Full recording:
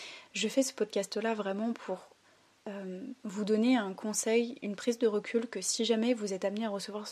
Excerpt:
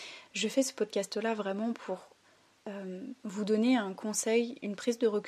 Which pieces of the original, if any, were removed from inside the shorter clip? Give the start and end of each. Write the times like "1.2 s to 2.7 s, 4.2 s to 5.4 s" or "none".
none